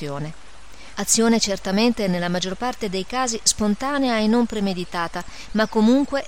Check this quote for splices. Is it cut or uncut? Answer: cut